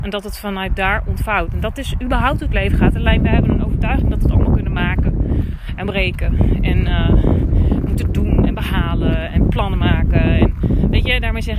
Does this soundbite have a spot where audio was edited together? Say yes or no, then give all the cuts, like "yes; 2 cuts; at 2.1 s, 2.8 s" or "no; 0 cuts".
no; 0 cuts